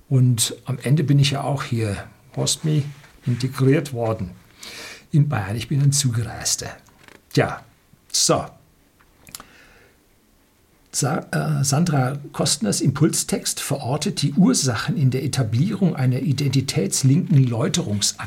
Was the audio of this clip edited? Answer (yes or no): yes